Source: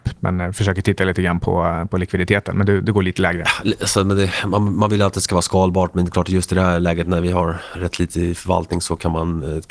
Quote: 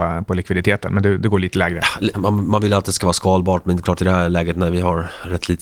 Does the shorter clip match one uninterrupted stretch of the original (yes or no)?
no